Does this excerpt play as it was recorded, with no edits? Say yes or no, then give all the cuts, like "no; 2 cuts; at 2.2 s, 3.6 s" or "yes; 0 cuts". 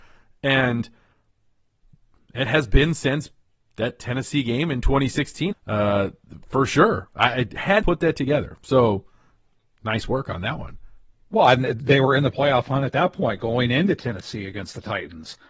no; 2 cuts; at 5.5 s, 7.8 s